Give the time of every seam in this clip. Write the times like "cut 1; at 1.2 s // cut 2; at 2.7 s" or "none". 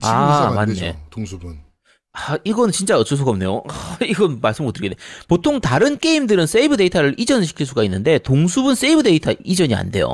none

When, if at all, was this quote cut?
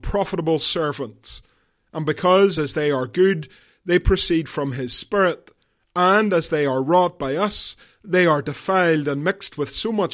none

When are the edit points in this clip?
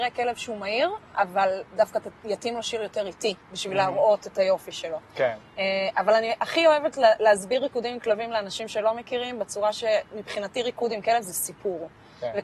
none

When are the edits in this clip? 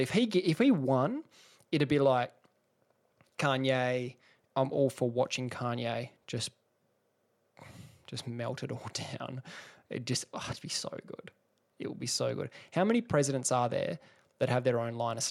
cut 1; at 4.5 s

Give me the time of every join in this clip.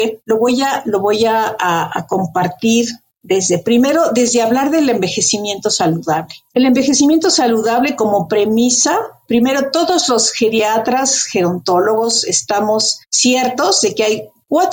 none

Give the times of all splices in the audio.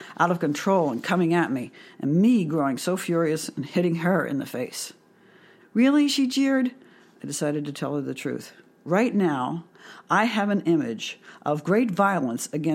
cut 1; at 5.6 s

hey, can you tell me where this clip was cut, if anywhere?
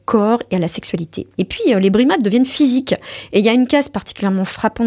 cut 1; at 1.3 s

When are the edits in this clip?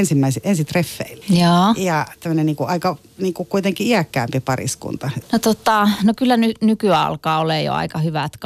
cut 1; at 1.2 s // cut 2; at 5.2 s

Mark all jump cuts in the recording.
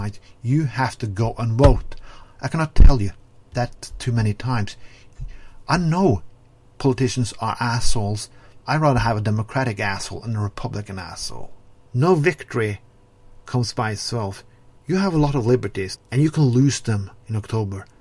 cut 1; at 8.6 s // cut 2; at 11.9 s // cut 3; at 16.0 s

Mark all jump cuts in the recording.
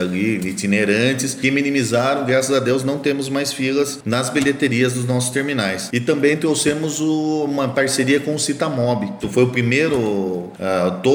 cut 1; at 9.2 s

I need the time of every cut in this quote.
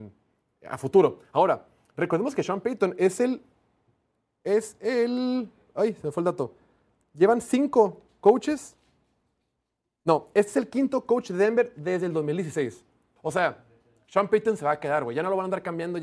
cut 1; at 13.2 s

